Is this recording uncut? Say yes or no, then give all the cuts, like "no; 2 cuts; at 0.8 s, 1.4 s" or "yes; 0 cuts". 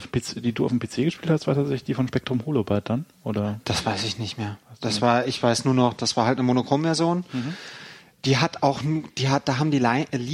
yes; 0 cuts